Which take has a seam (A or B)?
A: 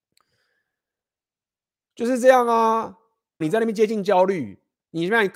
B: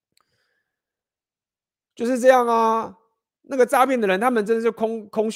A